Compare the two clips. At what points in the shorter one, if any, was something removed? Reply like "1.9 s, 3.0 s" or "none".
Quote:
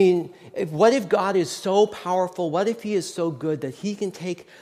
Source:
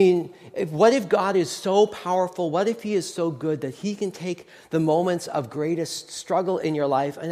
none